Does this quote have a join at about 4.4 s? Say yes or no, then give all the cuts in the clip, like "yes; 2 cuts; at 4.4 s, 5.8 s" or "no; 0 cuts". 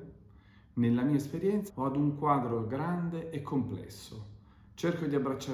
no; 1 cut; at 1.7 s